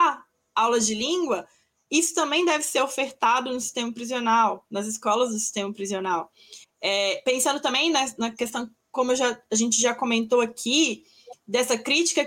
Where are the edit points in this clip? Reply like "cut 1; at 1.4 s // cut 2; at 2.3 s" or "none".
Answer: cut 1; at 6.6 s